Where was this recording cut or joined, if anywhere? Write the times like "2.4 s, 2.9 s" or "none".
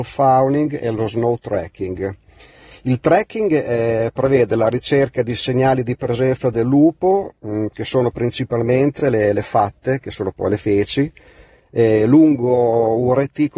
none